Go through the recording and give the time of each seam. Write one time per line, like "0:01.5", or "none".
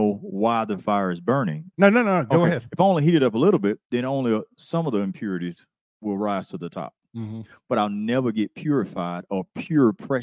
0:01.7